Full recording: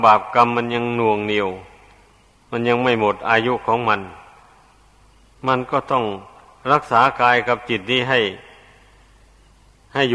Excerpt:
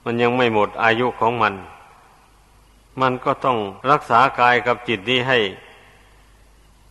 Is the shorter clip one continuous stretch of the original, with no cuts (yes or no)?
no